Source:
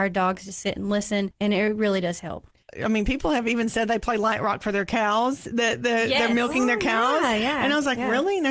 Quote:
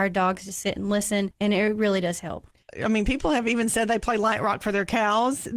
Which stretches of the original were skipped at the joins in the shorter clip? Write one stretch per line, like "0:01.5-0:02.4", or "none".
none